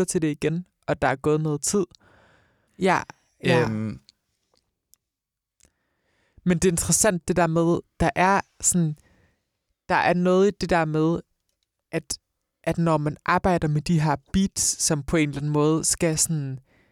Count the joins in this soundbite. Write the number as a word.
one